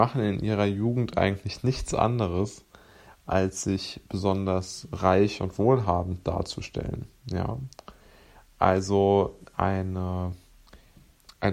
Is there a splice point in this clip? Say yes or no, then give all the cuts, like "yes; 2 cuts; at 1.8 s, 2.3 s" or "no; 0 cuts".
no; 0 cuts